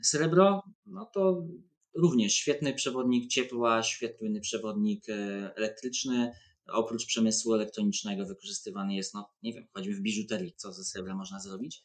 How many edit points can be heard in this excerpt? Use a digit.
1